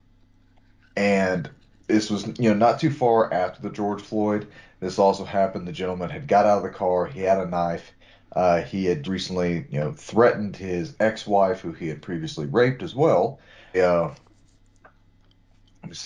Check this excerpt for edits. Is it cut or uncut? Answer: cut